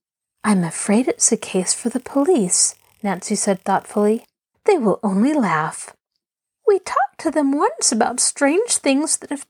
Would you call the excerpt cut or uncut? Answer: cut